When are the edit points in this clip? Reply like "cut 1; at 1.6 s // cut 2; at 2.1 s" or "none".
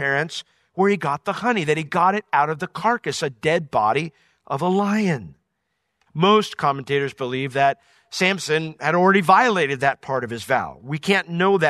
cut 1; at 6.1 s